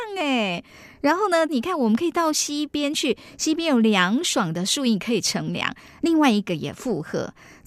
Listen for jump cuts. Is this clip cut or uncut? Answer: cut